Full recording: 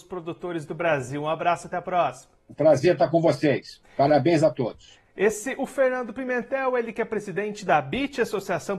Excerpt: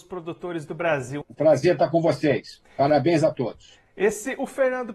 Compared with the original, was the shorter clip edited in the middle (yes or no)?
yes